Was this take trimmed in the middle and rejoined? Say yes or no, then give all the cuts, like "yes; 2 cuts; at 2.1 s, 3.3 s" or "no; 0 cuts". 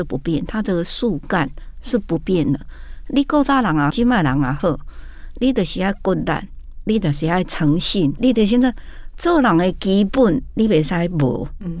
yes; 2 cuts; at 3.9 s, 8.2 s